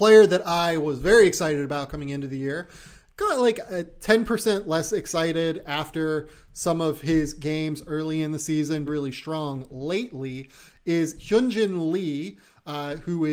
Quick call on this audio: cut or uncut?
cut